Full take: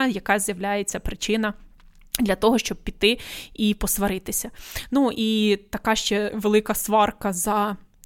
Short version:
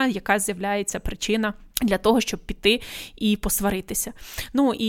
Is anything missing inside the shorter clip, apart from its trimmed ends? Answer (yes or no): yes